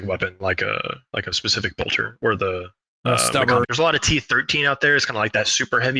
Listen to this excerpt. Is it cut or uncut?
cut